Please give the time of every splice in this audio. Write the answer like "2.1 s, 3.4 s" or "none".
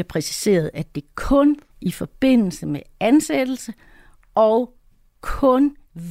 1.7 s